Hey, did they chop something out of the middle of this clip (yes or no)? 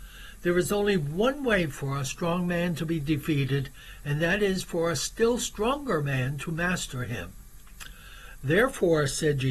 no